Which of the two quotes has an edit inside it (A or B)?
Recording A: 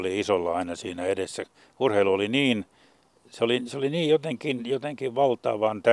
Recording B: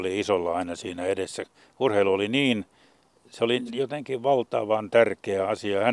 B